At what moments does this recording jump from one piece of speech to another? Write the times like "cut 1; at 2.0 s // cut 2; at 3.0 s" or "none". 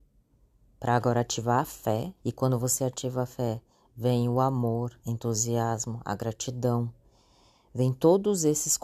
cut 1; at 2.2 s // cut 2; at 5.0 s